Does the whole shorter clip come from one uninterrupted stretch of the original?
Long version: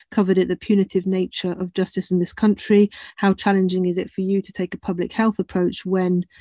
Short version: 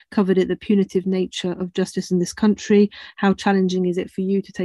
yes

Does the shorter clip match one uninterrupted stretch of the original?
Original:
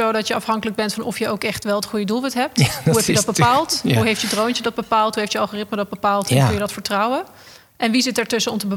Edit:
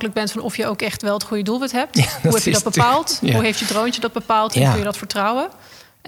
no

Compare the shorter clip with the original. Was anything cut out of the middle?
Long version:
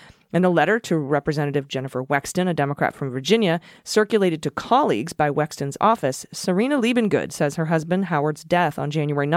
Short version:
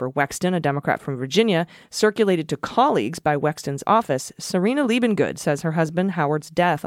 no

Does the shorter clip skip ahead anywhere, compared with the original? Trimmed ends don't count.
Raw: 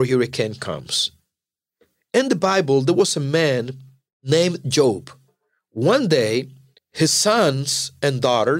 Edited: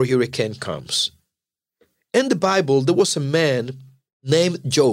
no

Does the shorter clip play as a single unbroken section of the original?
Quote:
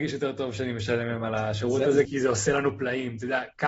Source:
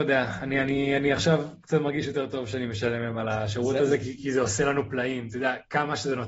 no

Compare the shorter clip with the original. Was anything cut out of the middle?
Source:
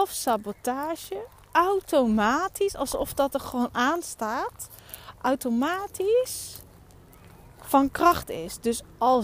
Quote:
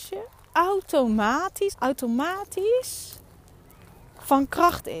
yes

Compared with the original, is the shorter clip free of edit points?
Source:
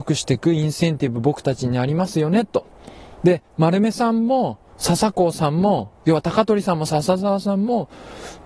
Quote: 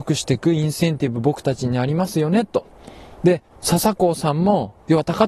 no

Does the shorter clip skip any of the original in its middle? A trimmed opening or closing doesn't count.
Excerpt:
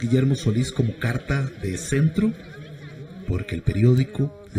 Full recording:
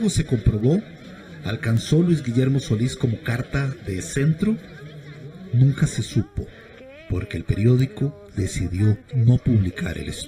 yes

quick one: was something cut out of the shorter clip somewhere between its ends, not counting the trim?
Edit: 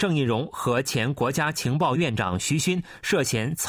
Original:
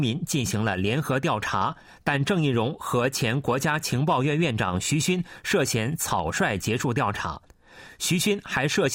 yes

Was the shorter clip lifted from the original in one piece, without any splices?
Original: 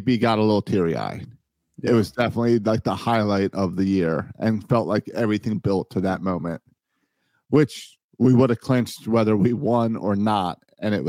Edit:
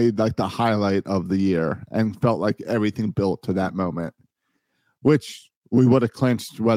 yes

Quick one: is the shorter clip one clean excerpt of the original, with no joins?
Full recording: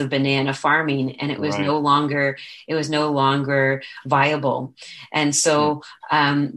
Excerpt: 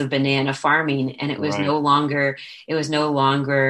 yes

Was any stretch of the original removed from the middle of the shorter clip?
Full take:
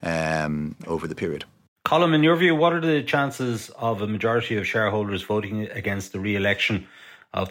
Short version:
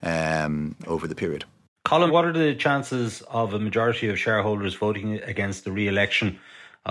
yes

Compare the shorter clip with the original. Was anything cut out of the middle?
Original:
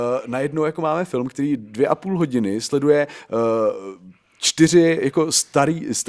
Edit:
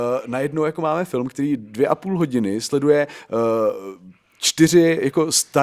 no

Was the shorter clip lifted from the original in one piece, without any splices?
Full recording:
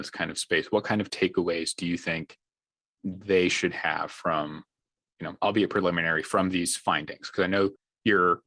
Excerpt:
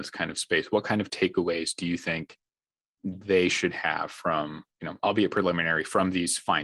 no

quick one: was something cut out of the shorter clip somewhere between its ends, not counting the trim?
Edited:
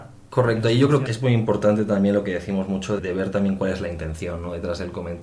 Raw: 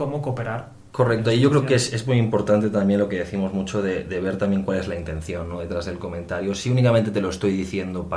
yes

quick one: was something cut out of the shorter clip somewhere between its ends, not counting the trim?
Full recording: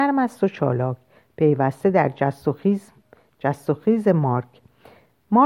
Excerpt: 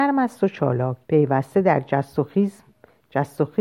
yes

